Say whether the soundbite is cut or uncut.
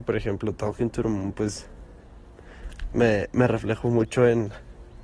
uncut